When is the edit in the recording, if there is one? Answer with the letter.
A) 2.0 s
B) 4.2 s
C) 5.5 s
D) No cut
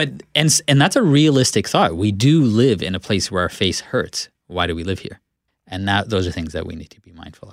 C